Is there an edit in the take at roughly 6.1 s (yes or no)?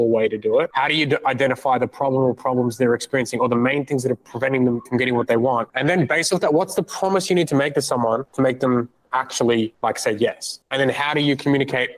no